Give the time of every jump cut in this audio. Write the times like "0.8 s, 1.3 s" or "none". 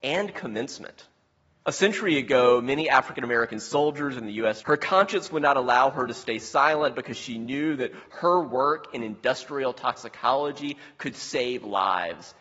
1.6 s, 4.6 s